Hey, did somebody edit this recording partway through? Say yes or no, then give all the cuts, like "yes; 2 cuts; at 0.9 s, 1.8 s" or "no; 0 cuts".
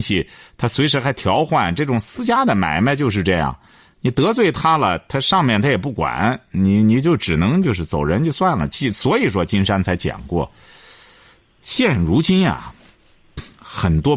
no; 0 cuts